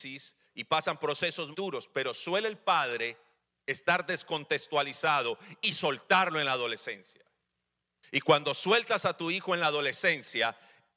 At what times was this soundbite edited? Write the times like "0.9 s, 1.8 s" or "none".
1.5 s